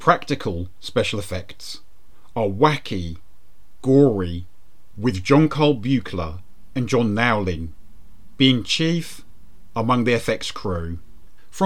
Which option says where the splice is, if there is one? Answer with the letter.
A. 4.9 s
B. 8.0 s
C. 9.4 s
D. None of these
A